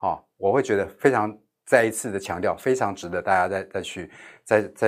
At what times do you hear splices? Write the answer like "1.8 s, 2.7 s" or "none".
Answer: none